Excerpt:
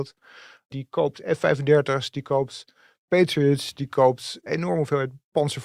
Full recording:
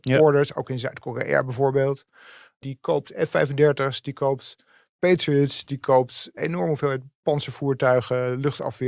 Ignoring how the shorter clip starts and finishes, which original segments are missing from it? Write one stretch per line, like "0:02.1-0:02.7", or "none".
none